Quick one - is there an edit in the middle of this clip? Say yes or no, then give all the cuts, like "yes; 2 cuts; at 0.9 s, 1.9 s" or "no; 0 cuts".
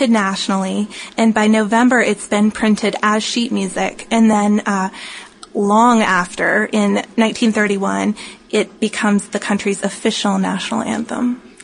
no; 0 cuts